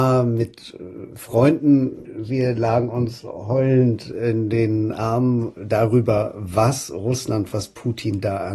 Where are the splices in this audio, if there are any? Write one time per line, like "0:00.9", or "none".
none